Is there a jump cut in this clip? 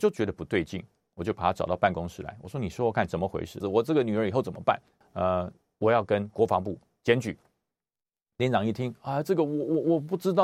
yes; 2 cuts; at 3.6 s, 5.0 s

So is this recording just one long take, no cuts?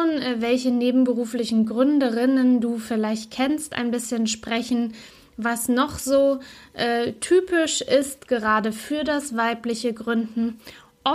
yes; 0 cuts

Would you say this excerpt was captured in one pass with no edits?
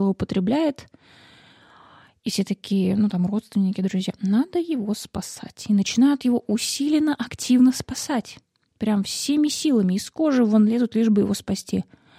yes; 0 cuts

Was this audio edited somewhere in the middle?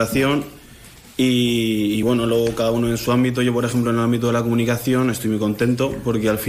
no; 0 cuts

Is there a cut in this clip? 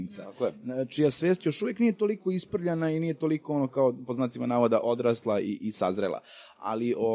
no; 0 cuts

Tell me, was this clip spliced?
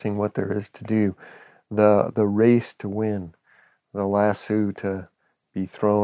no; 0 cuts

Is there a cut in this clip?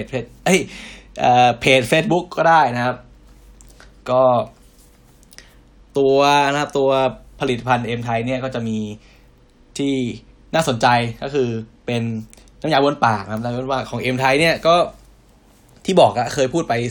no; 0 cuts

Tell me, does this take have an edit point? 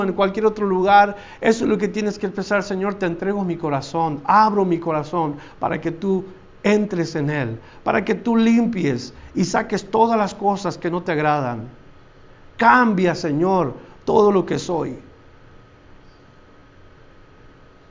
no; 0 cuts

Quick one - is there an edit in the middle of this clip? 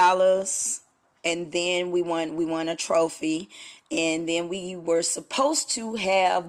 no; 0 cuts

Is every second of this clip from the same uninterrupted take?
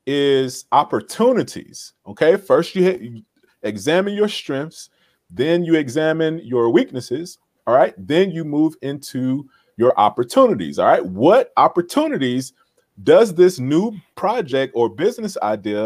yes; 0 cuts

